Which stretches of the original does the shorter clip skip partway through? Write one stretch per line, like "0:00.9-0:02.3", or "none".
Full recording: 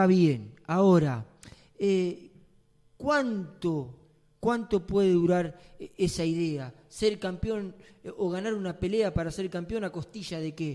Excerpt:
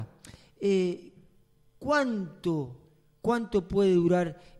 none